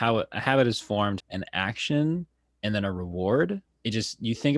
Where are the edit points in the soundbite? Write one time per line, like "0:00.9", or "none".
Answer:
0:01.2
0:03.7